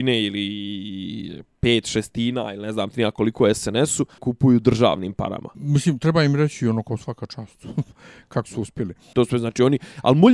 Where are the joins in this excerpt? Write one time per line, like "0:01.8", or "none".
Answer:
0:04.2
0:05.5
0:09.1